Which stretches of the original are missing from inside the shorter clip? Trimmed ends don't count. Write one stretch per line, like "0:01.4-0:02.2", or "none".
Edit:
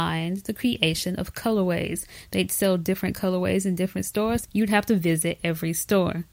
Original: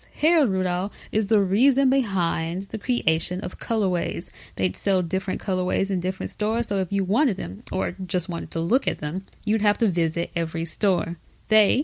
0:06.7-0:09.4